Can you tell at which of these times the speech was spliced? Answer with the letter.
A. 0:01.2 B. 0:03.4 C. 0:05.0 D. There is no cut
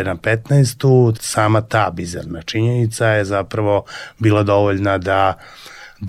A